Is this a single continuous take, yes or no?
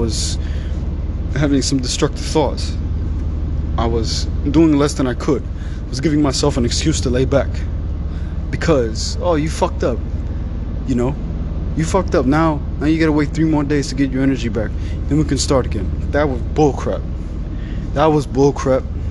yes